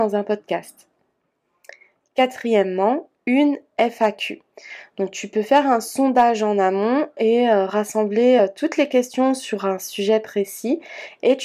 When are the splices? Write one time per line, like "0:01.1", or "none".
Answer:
none